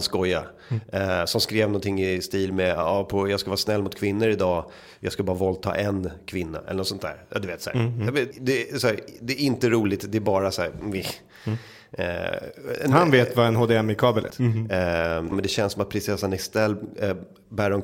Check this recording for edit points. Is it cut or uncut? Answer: cut